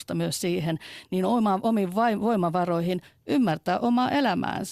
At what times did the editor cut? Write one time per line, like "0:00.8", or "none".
none